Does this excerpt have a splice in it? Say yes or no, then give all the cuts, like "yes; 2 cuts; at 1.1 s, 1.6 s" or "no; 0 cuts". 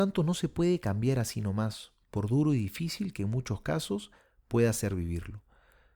no; 0 cuts